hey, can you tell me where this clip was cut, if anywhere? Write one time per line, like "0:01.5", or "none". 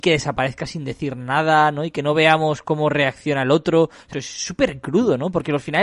0:04.1